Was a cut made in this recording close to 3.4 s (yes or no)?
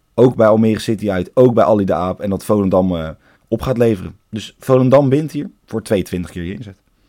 yes